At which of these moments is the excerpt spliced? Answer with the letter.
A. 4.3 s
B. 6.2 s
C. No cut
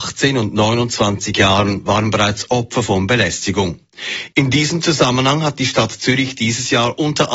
A